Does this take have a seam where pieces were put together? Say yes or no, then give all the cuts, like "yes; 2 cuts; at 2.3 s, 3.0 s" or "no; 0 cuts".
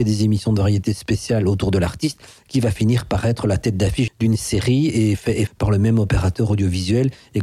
yes; 2 cuts; at 4.1 s, 5.5 s